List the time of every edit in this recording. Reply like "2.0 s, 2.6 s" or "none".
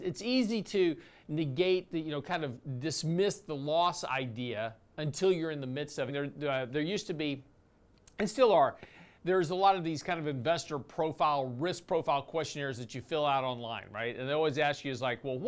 6.1 s